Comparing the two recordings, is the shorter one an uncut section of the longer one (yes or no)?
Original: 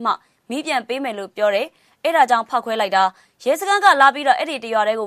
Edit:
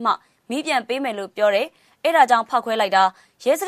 yes